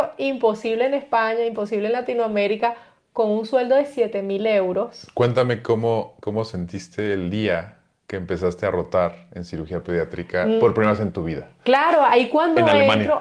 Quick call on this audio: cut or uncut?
uncut